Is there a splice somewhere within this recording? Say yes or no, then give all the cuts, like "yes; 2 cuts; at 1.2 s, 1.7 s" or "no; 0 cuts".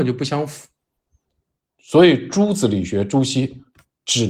no; 0 cuts